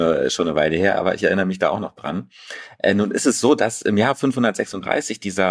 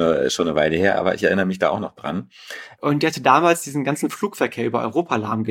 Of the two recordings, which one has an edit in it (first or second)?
second